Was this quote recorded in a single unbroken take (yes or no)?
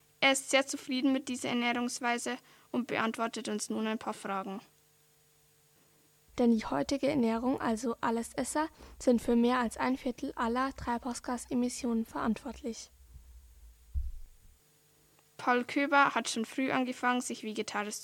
no